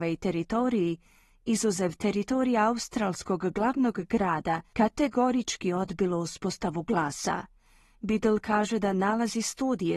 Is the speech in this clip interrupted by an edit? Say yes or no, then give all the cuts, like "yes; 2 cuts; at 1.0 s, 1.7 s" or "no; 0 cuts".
no; 0 cuts